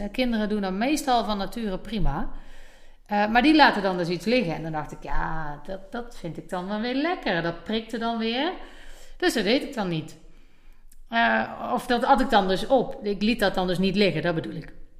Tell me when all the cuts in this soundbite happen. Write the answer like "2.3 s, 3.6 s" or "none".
none